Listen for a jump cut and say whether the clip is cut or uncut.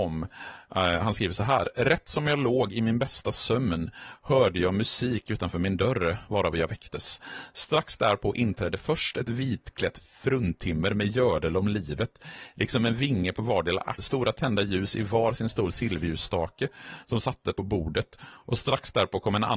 cut